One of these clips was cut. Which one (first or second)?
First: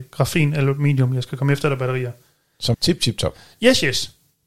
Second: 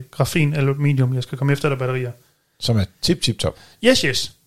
first